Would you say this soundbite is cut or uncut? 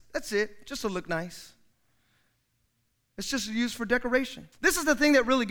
cut